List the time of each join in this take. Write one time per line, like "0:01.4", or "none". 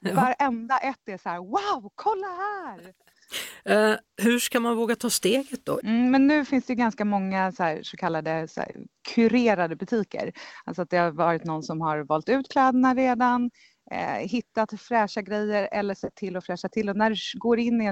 0:05.8